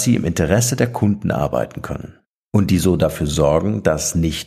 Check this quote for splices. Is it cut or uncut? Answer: uncut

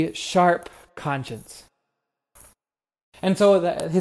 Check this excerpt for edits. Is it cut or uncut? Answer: cut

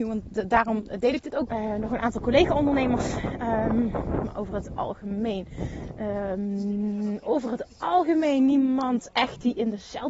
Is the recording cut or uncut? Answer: cut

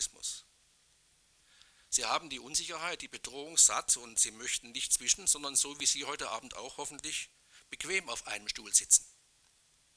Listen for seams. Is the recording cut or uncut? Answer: uncut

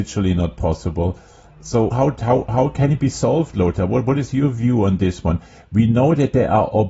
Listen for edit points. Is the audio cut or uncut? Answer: cut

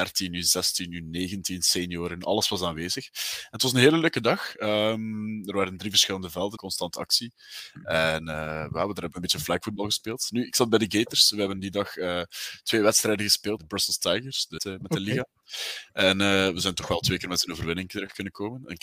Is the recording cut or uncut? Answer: cut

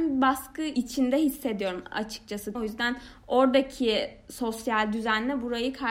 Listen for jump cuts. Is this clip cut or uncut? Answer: cut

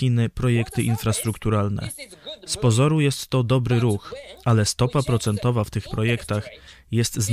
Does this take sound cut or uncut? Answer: uncut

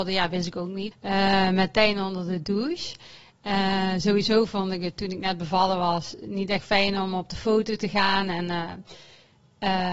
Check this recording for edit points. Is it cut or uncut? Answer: cut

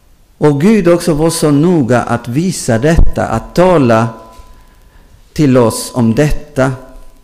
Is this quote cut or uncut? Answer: uncut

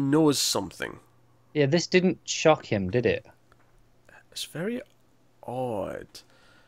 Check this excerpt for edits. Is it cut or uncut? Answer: uncut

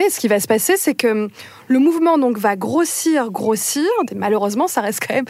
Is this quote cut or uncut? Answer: cut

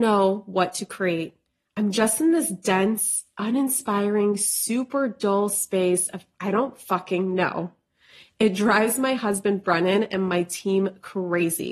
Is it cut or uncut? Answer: uncut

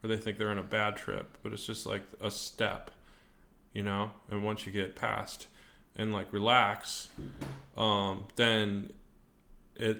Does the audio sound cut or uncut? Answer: uncut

